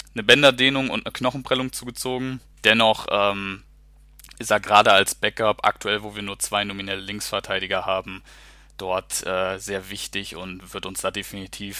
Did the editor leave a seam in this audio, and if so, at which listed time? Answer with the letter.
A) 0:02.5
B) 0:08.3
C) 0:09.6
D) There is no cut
A